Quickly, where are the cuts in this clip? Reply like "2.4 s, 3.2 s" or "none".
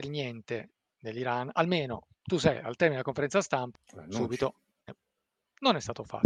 3.7 s

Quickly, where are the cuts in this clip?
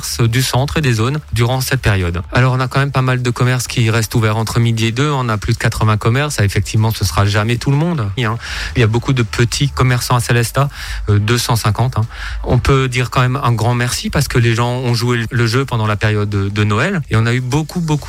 8.2 s

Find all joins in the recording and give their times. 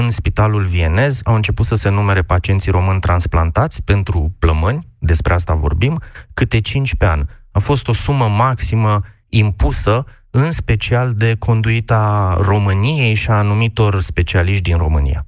none

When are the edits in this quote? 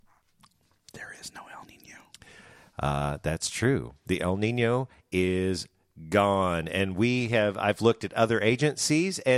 none

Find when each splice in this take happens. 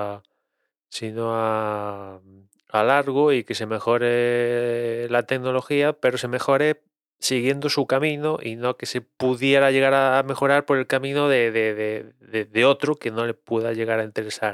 none

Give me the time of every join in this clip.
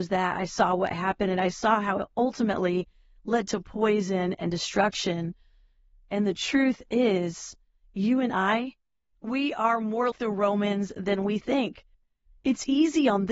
10.1 s

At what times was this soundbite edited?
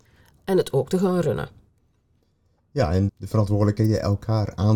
3.1 s

